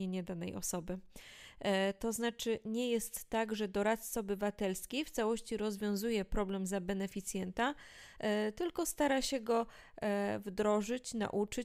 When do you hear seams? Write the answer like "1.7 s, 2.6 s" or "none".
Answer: none